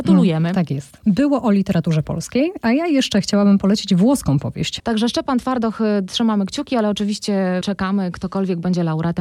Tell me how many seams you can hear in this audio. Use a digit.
2